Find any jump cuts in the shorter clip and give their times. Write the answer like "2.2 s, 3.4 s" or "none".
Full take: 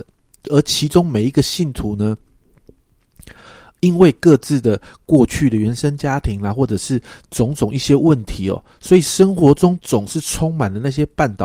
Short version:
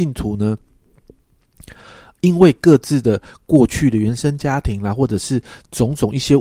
none